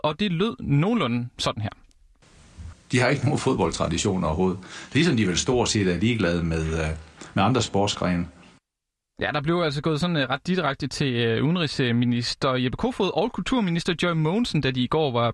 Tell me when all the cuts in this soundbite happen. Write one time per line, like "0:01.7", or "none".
0:02.7

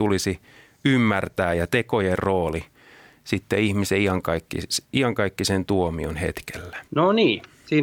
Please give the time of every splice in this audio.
0:06.9

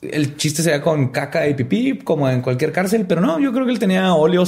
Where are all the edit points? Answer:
none

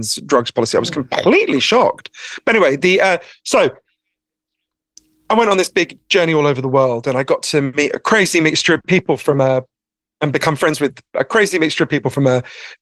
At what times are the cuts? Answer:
none

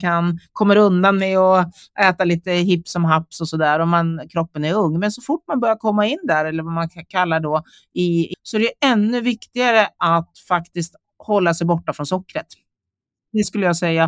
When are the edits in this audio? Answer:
0:08.3

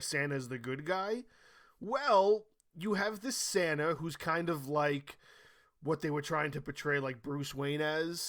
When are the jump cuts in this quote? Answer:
none

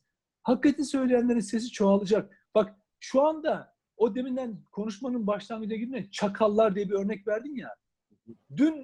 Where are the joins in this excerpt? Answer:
none

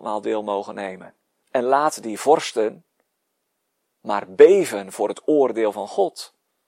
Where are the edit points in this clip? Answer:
0:01.4

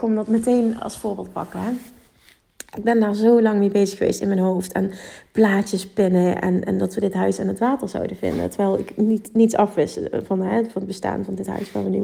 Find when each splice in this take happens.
none

